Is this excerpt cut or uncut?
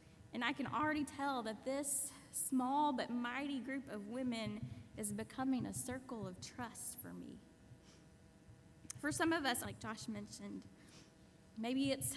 cut